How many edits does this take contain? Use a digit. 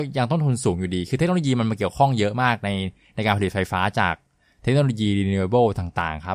0